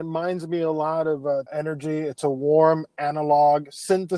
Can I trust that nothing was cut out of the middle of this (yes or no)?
no